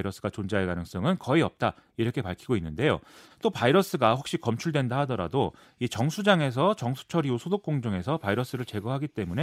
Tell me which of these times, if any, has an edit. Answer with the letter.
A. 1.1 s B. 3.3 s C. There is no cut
B